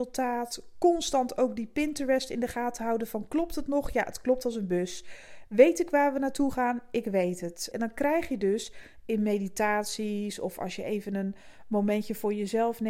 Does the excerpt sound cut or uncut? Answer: cut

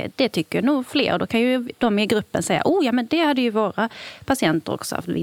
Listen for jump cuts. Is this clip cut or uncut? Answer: uncut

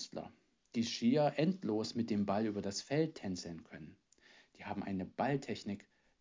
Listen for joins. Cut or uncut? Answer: uncut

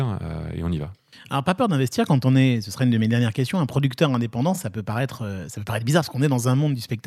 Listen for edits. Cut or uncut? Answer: uncut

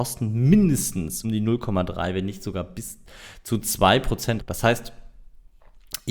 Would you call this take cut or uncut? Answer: cut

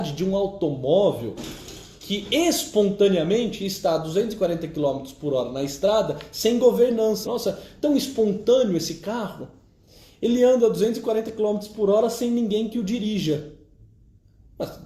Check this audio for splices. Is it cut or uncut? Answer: cut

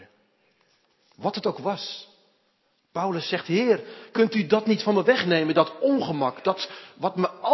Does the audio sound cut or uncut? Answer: uncut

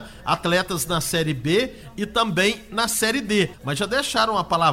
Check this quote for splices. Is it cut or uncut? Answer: cut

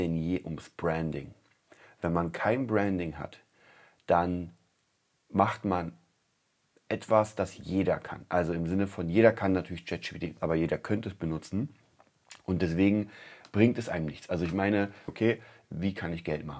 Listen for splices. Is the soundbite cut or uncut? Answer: cut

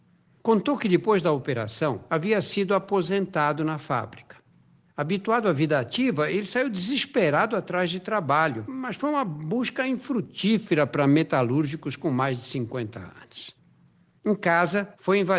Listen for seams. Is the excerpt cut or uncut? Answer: uncut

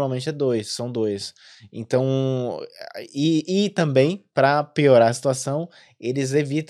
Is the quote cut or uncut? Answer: uncut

